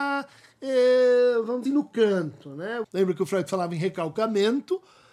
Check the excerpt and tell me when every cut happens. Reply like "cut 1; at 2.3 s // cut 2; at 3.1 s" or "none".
cut 1; at 1.7 s // cut 2; at 2.8 s